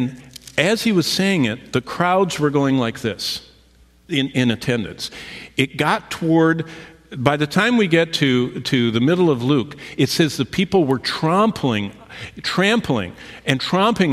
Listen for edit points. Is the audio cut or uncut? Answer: uncut